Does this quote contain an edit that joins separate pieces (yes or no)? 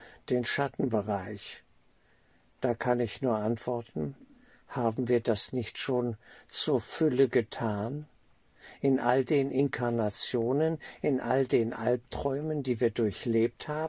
no